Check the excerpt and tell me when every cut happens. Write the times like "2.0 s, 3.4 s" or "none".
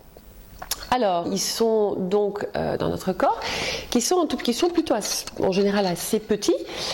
1.2 s, 2.8 s